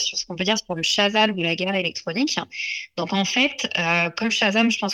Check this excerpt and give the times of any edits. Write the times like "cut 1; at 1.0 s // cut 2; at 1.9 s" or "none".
none